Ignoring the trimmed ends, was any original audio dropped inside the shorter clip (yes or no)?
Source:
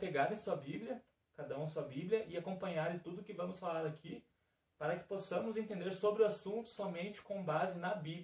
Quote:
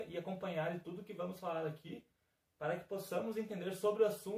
no